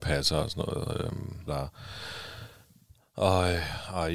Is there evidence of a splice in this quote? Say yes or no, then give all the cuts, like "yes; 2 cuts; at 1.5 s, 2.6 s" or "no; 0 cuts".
yes; 1 cut; at 1.5 s